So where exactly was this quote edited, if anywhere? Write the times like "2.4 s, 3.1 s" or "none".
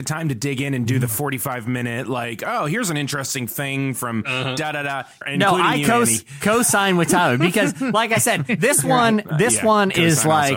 5.2 s